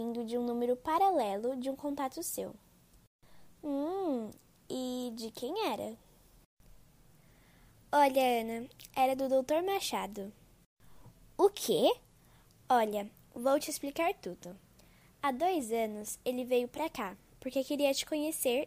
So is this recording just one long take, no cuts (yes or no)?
no